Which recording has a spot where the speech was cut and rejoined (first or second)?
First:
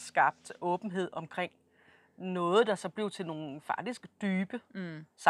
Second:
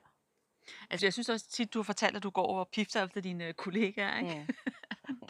second